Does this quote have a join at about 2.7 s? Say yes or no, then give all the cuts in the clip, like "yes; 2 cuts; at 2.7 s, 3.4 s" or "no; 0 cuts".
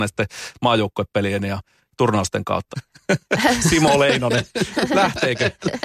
yes; 1 cut; at 2.7 s